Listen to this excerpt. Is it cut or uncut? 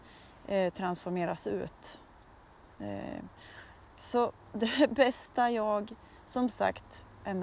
uncut